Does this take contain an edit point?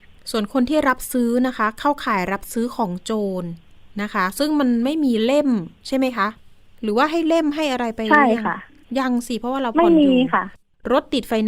no; 0 cuts

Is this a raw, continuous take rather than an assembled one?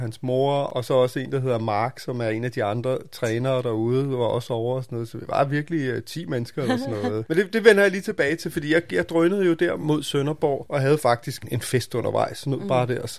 yes; 0 cuts

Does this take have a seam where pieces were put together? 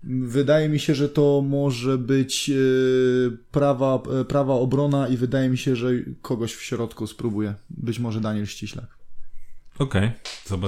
no; 0 cuts

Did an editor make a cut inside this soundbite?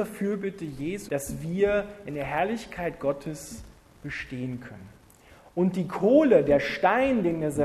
yes; 1 cut; at 1.1 s

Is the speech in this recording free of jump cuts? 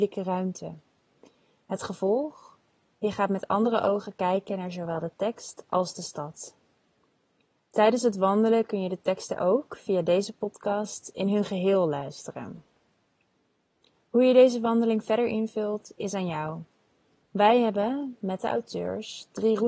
yes; 0 cuts

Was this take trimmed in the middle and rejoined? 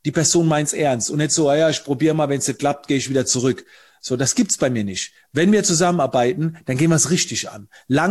no; 0 cuts

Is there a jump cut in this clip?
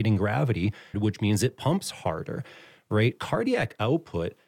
yes; 1 cut; at 0.9 s

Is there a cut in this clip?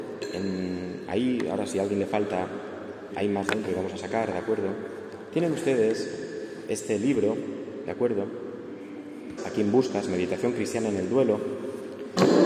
yes; 2 cuts; at 3.1 s, 9.4 s

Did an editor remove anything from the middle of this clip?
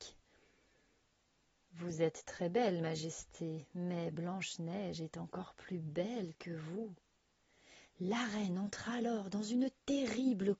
no; 0 cuts

